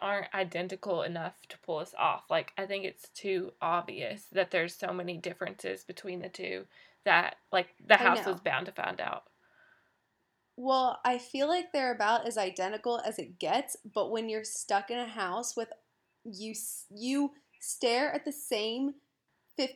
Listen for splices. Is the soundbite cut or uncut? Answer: uncut